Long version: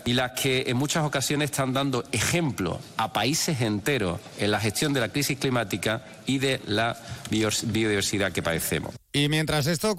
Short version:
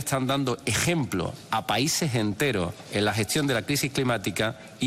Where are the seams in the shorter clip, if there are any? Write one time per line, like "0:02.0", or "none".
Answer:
none